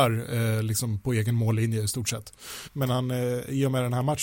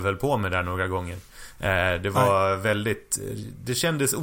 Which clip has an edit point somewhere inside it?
first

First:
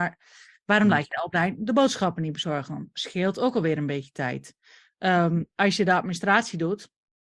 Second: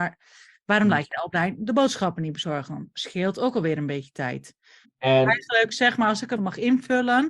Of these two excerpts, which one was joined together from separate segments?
second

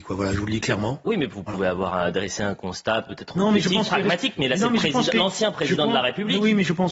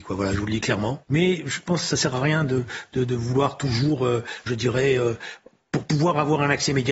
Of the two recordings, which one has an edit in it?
second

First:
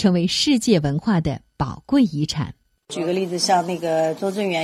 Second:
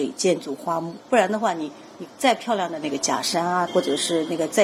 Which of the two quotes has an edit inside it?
second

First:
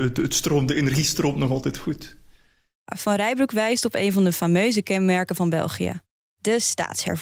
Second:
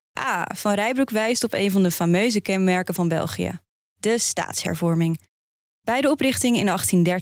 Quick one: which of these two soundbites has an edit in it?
first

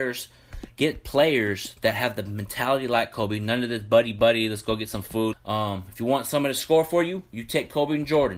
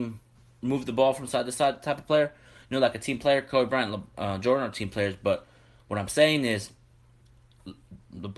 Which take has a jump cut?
first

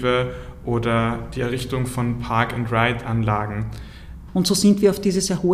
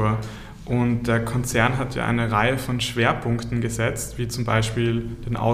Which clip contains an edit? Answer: first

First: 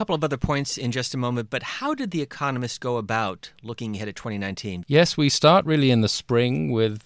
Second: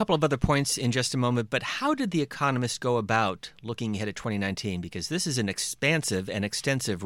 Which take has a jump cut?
first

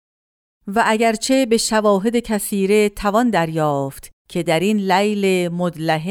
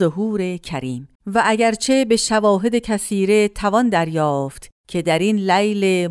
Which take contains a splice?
second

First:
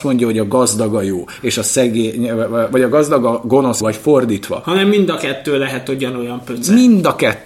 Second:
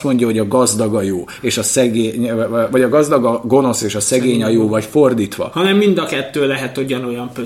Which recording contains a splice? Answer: first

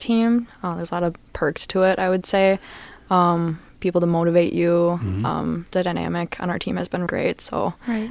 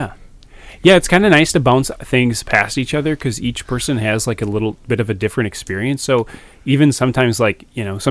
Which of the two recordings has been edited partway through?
first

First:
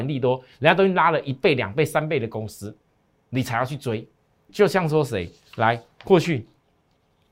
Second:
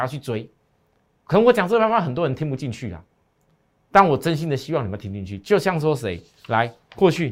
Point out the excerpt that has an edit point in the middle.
first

